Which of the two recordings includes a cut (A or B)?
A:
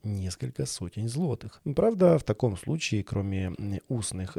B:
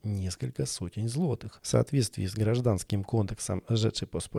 A